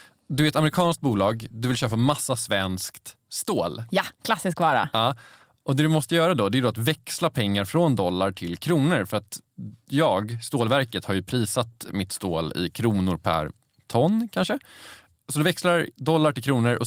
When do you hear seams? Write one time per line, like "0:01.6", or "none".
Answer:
none